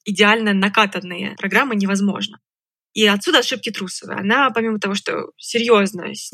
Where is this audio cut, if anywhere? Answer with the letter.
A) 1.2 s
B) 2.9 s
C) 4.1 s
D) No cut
D